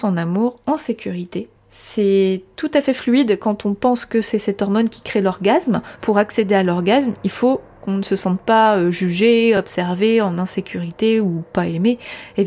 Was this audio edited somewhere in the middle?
no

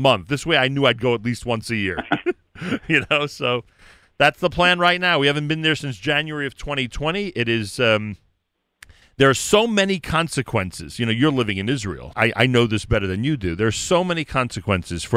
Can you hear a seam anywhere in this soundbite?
yes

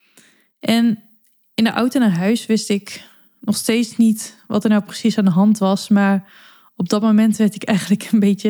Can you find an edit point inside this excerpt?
no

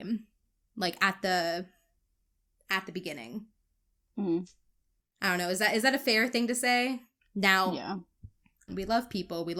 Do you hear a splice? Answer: yes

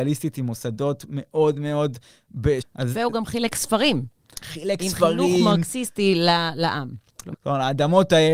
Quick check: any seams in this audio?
yes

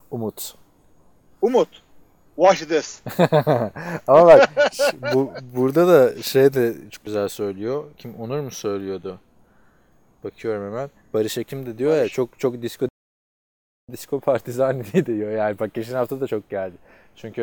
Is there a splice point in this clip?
no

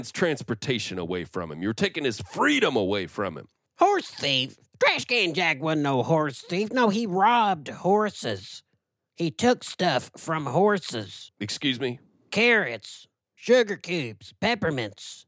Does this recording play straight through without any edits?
yes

